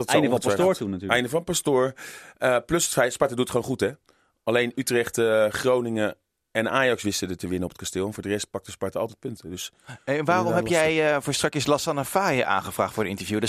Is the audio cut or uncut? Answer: uncut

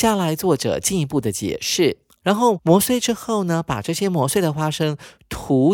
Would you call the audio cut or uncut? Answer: cut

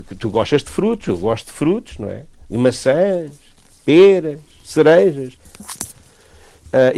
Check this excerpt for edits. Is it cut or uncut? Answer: cut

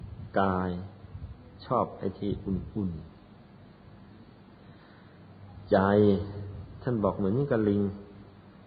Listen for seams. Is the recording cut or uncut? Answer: uncut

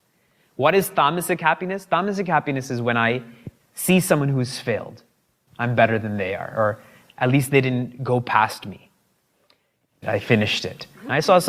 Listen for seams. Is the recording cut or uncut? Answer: cut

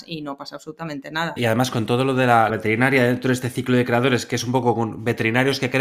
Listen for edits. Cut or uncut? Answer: cut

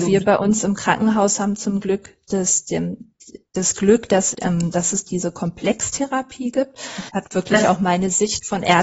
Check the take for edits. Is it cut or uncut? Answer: cut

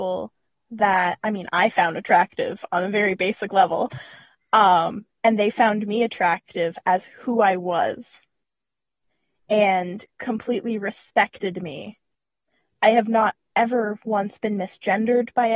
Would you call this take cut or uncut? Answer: uncut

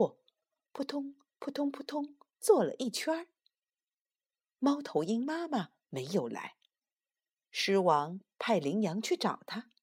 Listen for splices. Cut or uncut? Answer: uncut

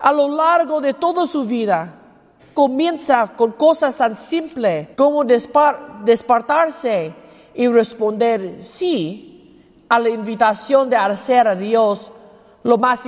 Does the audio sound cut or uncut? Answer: cut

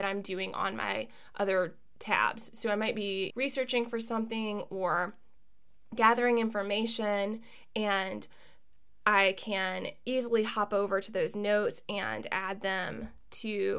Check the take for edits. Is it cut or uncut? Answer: cut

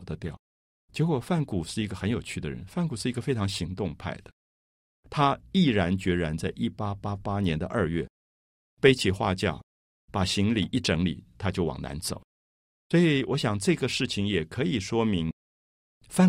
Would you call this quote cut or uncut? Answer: uncut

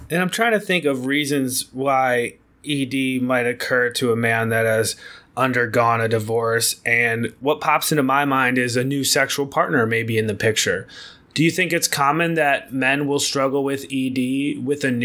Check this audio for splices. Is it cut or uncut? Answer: uncut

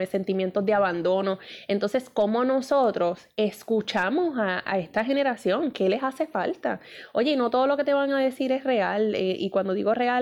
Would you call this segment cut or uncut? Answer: uncut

